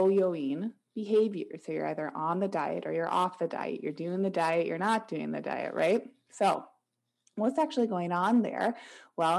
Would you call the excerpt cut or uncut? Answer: uncut